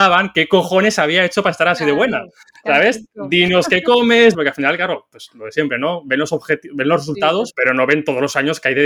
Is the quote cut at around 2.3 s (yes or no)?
no